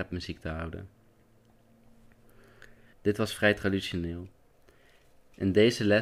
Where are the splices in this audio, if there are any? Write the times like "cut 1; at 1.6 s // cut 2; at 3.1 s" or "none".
cut 1; at 2.9 s